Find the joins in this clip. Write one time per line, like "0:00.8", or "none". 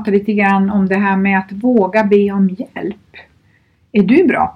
none